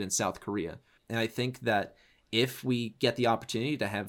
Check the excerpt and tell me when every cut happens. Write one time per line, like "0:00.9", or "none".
0:01.0